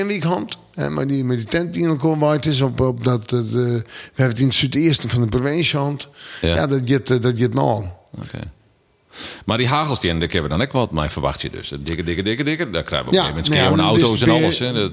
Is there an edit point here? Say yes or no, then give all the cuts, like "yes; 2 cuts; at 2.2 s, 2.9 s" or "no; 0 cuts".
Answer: no; 0 cuts